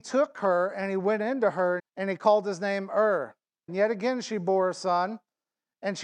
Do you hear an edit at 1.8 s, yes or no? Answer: yes